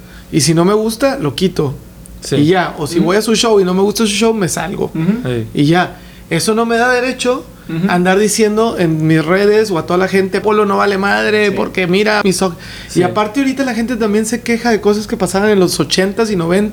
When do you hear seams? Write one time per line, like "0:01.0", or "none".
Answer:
0:10.4
0:12.2